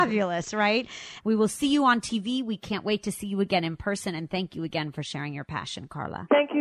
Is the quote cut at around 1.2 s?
yes; 1 cut; at 1.2 s

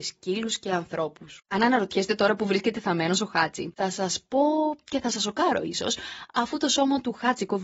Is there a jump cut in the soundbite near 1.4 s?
yes; 1 cut; at 1.4 s

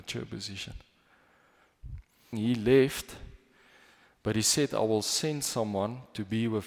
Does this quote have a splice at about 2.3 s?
yes; 1 cut; at 2.3 s

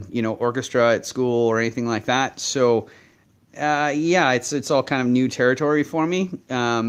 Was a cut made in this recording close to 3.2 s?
no; 0 cuts

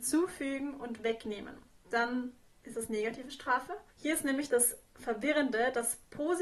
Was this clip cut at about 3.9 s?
yes; 2 cuts; at 1.7 s, 3.9 s

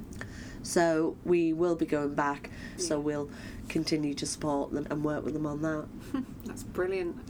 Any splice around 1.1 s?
no; 2 cuts; at 2.8 s, 4.8 s

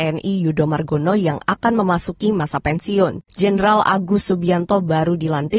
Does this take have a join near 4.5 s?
no; 1 cut; at 3.3 s

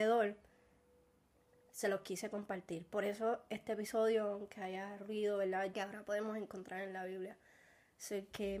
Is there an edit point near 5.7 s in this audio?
yes; 1 cut; at 5.7 s

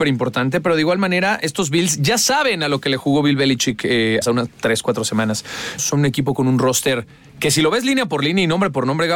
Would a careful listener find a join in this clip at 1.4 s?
no; 2 cuts; at 4.2 s, 5.8 s

